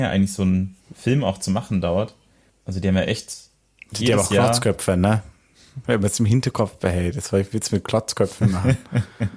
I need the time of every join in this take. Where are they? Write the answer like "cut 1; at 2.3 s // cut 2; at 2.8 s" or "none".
cut 1; at 2.5 s // cut 2; at 5.8 s